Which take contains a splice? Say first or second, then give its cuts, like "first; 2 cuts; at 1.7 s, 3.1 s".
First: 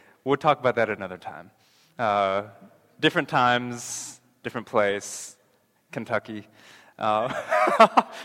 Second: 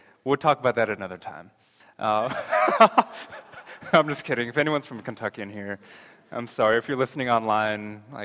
second; 1 cut; at 1.8 s